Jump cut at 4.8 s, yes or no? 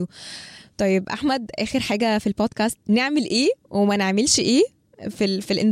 no